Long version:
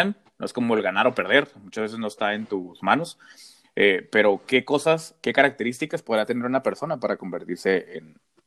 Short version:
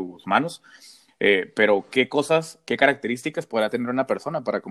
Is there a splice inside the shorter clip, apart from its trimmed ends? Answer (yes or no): no